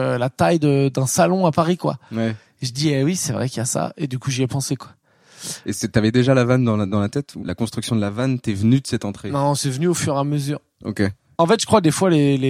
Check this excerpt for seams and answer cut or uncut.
cut